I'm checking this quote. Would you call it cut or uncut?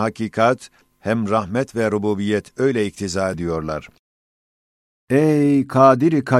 uncut